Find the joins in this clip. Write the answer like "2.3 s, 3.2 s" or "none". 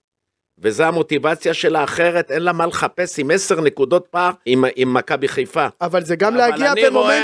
4.5 s